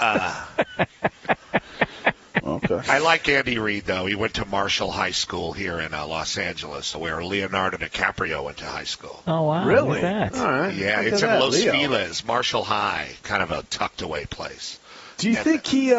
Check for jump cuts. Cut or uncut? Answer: cut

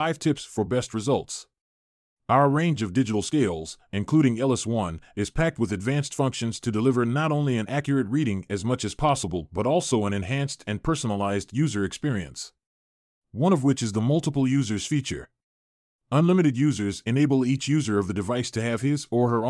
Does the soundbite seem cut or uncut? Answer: uncut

